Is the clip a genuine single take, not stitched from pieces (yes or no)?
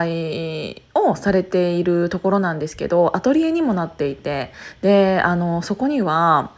yes